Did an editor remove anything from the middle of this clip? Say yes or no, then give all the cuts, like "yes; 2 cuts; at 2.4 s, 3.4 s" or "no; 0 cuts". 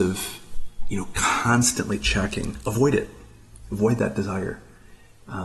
no; 0 cuts